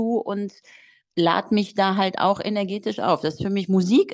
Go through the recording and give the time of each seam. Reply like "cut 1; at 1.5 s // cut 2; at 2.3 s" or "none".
none